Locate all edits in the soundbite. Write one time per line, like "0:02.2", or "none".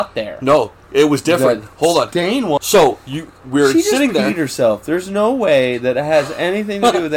0:02.6